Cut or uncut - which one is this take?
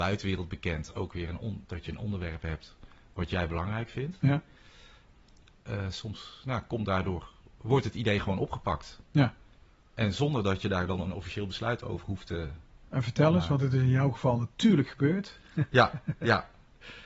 uncut